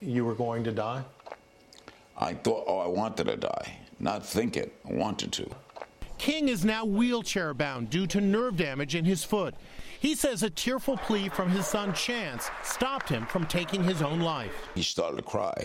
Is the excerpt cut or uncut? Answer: uncut